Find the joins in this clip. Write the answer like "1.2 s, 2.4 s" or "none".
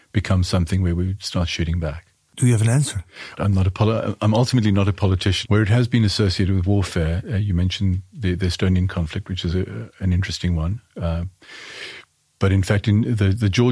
3.4 s, 5.4 s